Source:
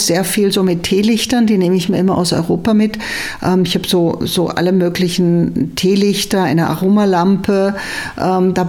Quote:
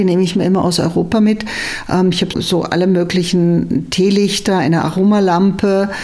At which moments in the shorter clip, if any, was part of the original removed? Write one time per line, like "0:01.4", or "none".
0:02.3